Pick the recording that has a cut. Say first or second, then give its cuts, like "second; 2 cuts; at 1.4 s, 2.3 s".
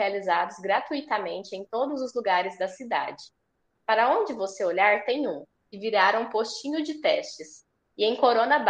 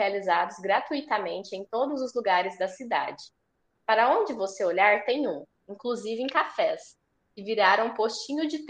first; 1 cut; at 5.6 s